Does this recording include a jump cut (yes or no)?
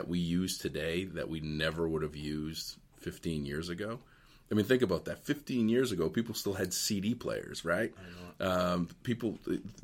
no